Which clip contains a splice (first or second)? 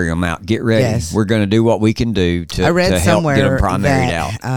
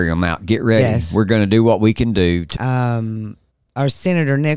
second